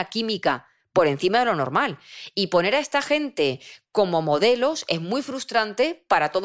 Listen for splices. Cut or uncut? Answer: uncut